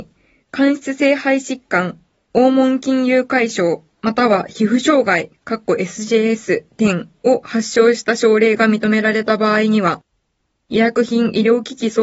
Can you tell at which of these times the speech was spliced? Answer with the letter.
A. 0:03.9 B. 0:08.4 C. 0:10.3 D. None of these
D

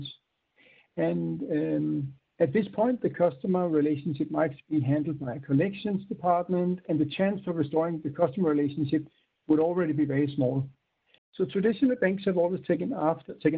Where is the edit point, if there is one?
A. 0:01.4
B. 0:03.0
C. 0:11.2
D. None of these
C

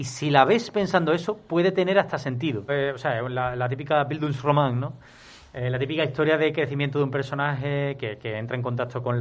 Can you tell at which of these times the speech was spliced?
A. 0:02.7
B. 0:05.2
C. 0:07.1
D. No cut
A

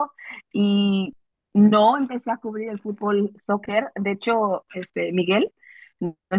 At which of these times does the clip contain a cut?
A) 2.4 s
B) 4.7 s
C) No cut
B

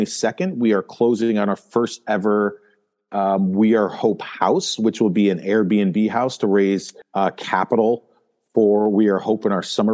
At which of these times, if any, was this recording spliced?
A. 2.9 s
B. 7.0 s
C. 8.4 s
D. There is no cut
B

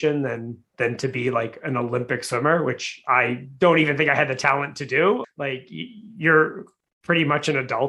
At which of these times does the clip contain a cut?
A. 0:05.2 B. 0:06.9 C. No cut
A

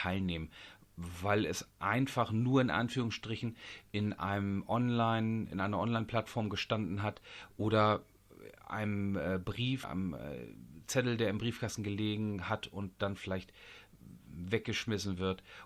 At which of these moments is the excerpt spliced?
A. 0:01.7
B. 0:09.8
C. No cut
B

